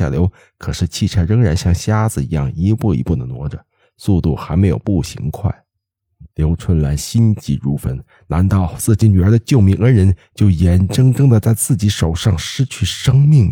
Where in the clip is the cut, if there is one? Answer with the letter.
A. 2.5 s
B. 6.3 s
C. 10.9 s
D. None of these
B